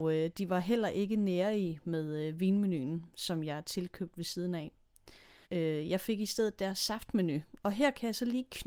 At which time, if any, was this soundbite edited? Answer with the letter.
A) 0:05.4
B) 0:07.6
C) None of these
A